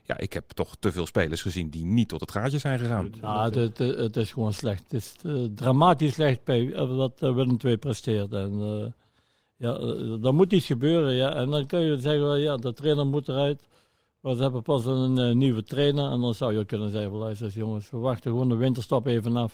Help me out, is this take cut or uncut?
uncut